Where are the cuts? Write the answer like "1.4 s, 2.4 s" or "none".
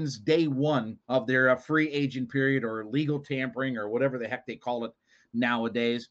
1.0 s